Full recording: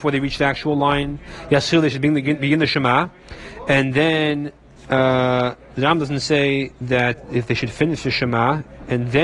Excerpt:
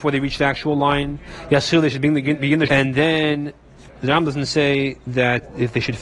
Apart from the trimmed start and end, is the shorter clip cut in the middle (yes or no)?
yes